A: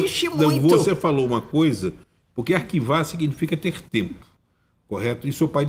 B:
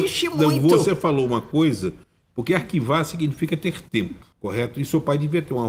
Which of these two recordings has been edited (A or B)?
B